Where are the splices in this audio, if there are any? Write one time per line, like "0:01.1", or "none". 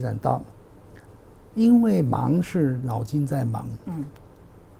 none